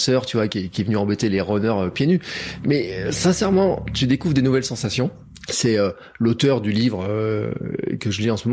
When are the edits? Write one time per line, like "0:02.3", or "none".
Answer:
0:05.5